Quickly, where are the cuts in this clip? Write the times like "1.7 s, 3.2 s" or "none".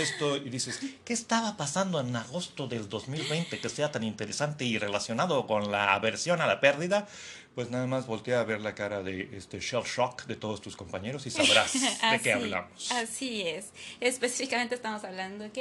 none

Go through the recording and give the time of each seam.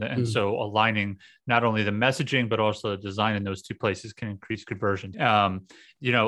5.1 s

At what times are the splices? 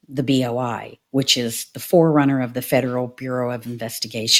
none

